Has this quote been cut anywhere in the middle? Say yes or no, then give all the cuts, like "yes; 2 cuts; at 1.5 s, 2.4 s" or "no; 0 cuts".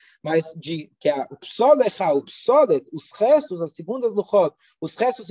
no; 0 cuts